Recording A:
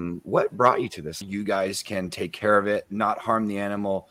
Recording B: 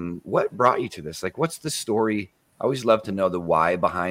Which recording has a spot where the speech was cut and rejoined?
A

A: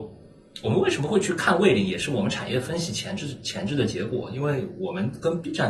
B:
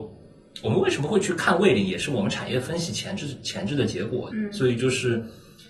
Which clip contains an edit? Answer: B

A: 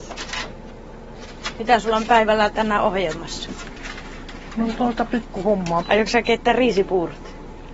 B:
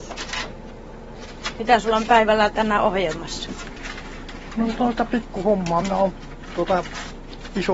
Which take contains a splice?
A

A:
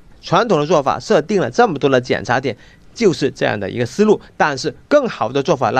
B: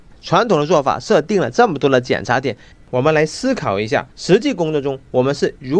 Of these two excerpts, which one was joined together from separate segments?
B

